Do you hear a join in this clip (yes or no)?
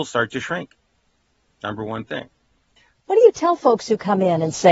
yes